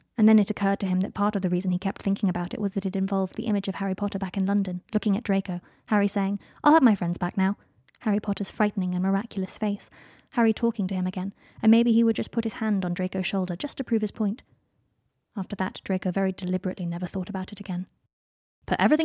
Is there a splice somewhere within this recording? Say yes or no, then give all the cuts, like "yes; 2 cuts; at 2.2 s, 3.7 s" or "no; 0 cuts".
no; 0 cuts